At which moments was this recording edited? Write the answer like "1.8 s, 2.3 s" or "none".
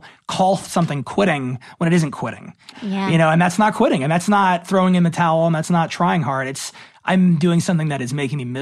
2.7 s

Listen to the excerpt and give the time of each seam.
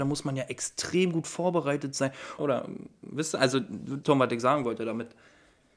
2.4 s, 4.0 s

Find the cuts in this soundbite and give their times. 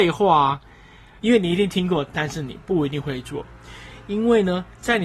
1.2 s

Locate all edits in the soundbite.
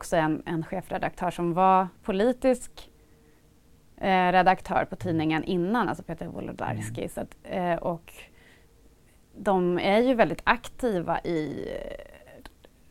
none

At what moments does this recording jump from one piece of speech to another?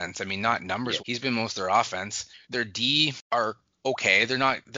1.0 s, 2.4 s

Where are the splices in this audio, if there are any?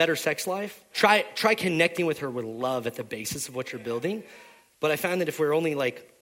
0.9 s, 4.7 s

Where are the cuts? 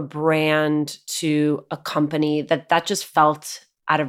none

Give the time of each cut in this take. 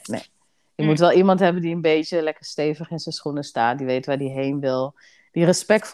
none

